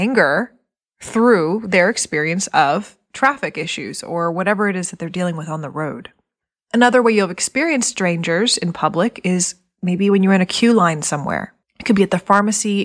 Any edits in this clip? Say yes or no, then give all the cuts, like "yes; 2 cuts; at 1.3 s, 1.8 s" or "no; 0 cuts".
no; 0 cuts